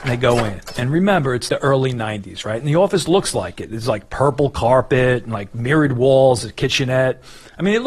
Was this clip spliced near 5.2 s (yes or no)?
no